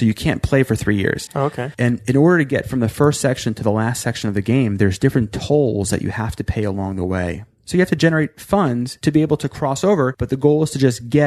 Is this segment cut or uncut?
cut